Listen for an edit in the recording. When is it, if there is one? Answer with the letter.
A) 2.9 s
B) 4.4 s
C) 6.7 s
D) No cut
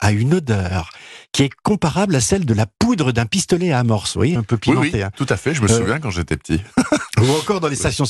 B